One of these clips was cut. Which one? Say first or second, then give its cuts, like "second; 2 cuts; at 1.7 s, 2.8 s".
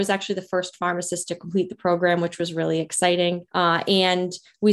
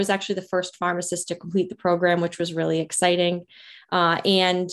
first; 1 cut; at 3.5 s